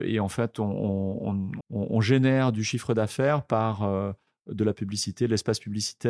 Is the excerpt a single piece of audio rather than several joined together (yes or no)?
no